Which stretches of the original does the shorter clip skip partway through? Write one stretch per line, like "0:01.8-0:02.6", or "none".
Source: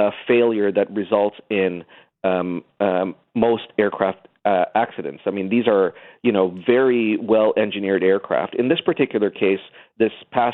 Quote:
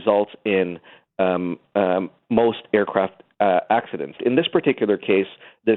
0:05.2-0:08.5